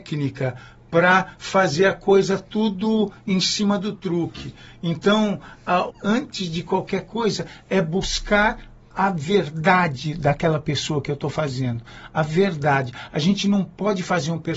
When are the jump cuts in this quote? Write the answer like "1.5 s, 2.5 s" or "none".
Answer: 5.9 s